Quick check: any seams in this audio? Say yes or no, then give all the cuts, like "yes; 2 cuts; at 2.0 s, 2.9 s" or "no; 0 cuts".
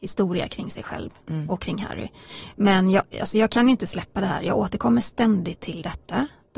no; 0 cuts